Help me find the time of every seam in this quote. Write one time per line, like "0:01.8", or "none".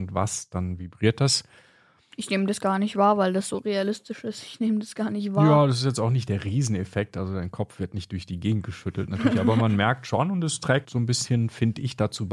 0:10.8